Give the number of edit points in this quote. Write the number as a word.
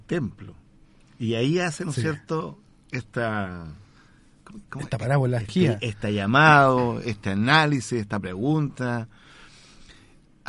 one